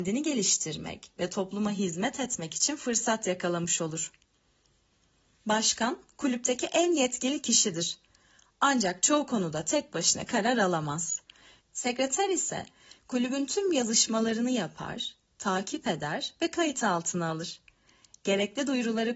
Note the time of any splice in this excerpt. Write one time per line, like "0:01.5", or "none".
0:11.6

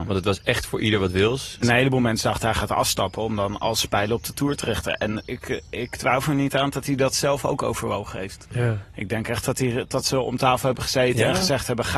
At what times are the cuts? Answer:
0:01.6

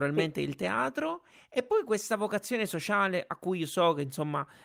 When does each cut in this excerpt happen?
none

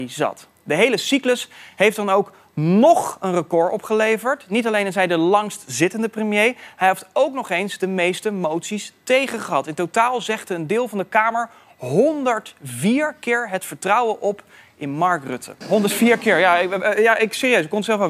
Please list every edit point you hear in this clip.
0:15.6

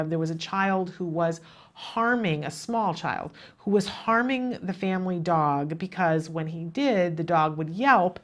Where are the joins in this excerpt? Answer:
none

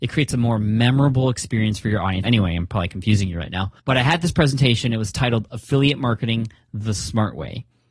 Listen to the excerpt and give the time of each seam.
0:02.2
0:03.8

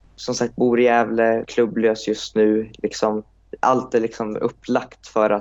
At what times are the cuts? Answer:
0:01.4

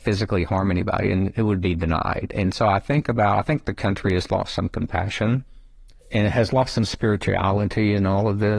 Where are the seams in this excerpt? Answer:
0:06.0

